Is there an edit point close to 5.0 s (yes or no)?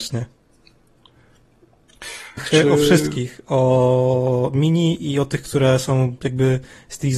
no